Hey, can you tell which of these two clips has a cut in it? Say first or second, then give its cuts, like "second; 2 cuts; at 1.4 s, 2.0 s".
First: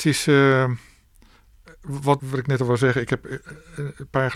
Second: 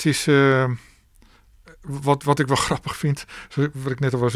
first; 1 cut; at 2.2 s